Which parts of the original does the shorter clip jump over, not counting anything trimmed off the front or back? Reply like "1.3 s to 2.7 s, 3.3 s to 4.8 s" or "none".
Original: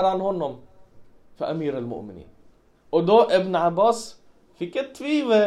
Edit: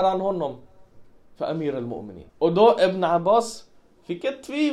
2.3 s to 2.8 s